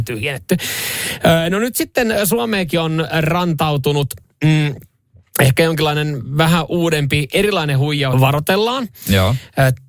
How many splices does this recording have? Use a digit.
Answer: 1